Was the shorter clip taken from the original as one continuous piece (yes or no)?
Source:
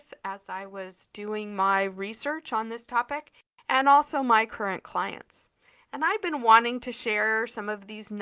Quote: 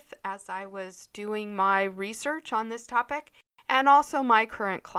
yes